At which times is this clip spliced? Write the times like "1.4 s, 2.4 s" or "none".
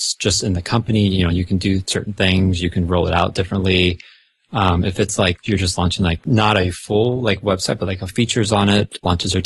none